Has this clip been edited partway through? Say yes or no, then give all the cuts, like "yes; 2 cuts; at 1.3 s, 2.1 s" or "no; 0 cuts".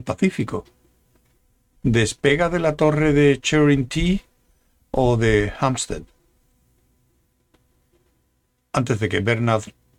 no; 0 cuts